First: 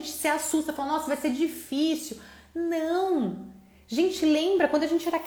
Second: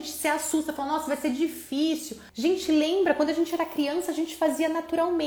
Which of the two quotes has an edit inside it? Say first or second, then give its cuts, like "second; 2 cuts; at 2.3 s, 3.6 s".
second; 1 cut; at 2.3 s